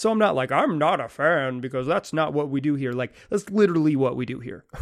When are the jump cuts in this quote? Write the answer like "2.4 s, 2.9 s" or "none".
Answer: none